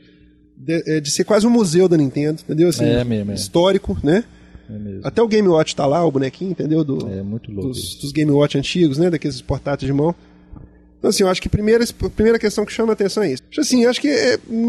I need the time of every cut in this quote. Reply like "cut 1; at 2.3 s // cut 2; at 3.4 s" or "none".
cut 1; at 13.4 s